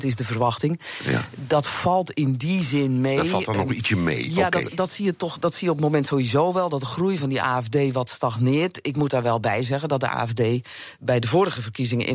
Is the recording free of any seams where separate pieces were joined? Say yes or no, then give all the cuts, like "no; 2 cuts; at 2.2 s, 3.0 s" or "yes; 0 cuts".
yes; 0 cuts